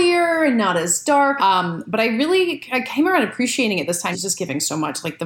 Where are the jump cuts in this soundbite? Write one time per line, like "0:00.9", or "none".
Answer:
0:01.4
0:04.1